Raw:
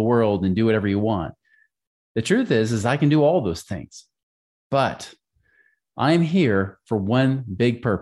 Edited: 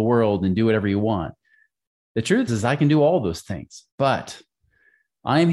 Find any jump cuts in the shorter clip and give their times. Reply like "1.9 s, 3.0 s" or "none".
2.5 s, 3.9 s